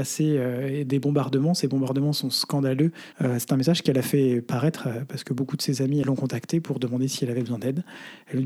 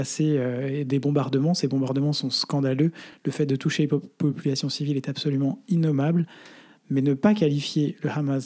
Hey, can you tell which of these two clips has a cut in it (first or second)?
first